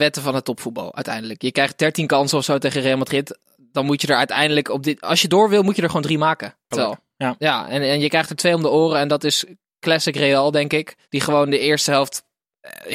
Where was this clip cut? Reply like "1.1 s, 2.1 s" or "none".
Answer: 6.7 s, 11.0 s